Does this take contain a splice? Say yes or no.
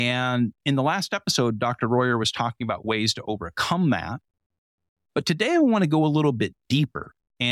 no